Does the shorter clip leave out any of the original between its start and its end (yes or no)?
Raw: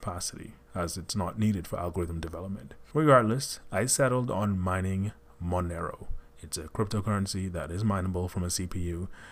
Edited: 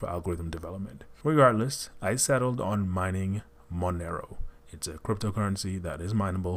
no